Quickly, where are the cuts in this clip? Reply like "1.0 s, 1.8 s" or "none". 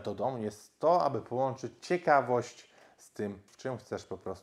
3.5 s